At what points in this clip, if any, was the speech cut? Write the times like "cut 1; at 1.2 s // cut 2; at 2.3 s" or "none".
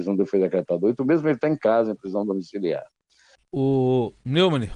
cut 1; at 3.4 s